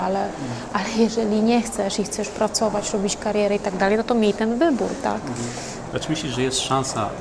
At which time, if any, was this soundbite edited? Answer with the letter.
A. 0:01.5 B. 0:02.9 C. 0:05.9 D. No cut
C